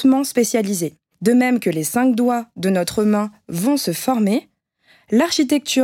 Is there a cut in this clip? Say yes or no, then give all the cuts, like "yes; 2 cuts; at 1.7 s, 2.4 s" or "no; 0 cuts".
yes; 1 cut; at 1.1 s